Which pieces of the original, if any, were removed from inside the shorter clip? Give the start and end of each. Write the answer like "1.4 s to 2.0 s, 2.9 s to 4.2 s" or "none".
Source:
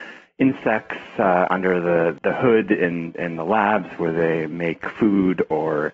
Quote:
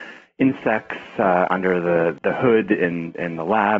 none

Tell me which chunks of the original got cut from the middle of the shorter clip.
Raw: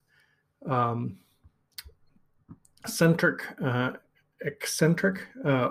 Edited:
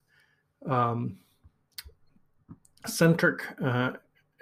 none

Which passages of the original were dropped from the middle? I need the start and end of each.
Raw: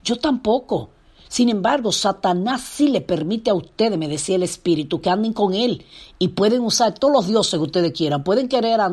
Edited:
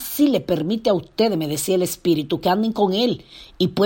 none

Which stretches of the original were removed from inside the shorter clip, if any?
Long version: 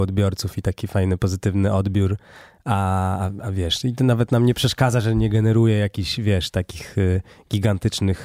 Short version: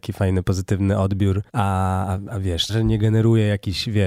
2.2 s to 2.6 s, 3.8 s to 5.0 s

